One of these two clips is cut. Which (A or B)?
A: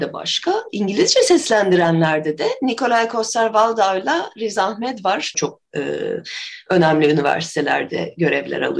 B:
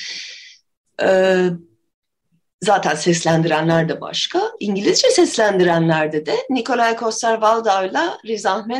A